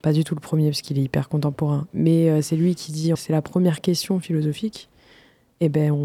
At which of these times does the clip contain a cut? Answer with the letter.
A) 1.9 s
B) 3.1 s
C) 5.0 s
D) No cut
B